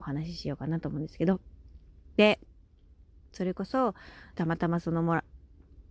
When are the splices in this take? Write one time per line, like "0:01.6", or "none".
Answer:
0:04.3